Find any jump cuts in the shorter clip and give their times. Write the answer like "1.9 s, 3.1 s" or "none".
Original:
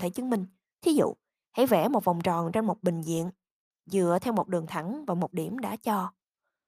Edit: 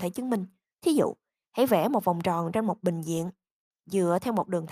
none